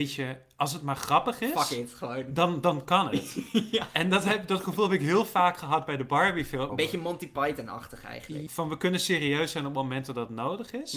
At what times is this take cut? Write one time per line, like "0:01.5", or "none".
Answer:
0:06.7
0:08.5